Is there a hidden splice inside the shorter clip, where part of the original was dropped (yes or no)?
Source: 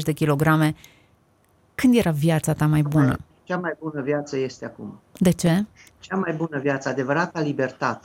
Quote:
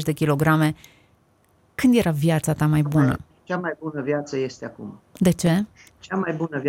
no